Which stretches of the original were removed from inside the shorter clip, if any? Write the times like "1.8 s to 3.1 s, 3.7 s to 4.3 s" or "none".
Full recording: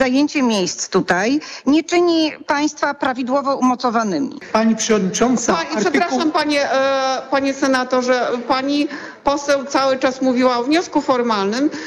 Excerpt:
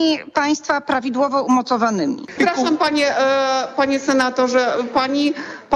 4.5 s to 5.9 s